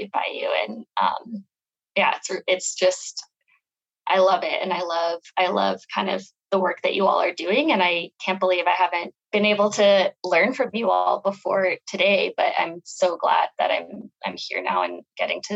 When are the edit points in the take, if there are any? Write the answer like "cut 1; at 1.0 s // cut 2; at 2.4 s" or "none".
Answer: cut 1; at 9.2 s